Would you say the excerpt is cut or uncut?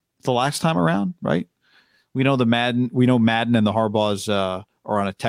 uncut